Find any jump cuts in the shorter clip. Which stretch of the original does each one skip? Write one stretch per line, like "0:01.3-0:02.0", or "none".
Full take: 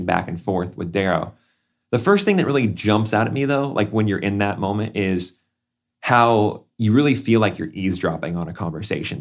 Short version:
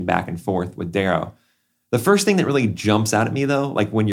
none